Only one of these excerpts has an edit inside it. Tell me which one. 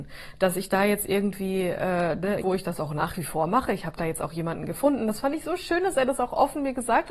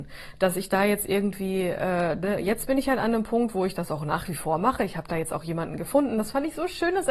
first; 1 cut; at 2.4 s

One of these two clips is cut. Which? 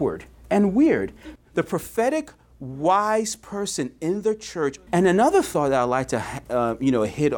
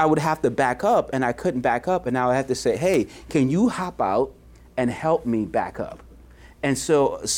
first; 2 cuts; at 1.4 s, 4.9 s

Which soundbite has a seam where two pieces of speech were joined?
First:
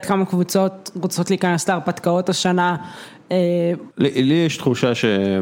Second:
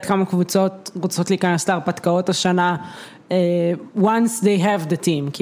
first; 1 cut; at 3.9 s

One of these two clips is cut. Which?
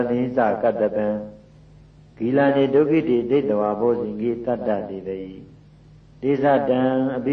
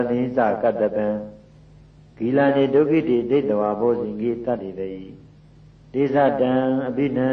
second; 1 cut; at 4.6 s

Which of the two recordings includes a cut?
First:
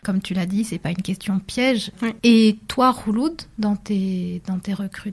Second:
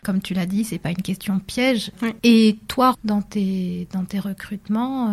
second; 1 cut; at 2.9 s

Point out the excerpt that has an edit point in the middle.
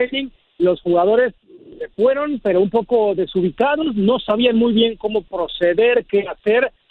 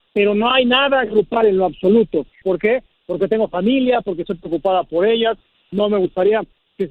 second; 2 cuts; at 2.4 s, 4.0 s

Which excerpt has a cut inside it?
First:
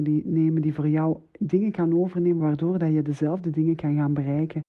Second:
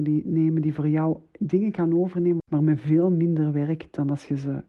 second; 1 cut; at 2.4 s

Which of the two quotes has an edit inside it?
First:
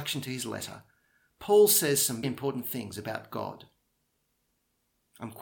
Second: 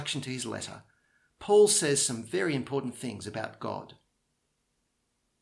first; 1 cut; at 2.2 s

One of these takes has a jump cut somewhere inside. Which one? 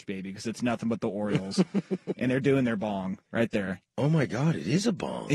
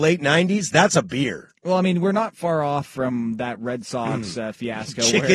first; 1 cut; at 3.2 s

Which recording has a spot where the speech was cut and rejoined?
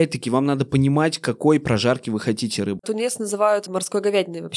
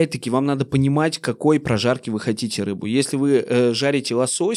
first; 1 cut; at 2.8 s

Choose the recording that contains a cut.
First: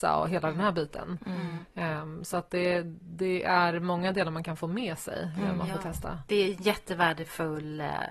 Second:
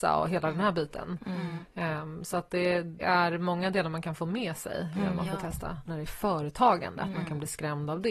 second; 2 cuts; at 3.0 s, 5.8 s

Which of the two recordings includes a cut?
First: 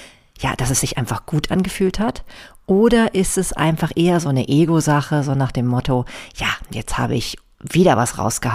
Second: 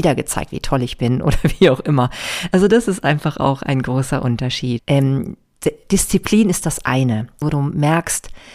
second; 2 cuts; at 4.8 s, 7.4 s

